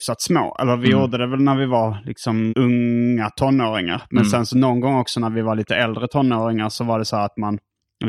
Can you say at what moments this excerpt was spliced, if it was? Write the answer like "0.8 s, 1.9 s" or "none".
2.5 s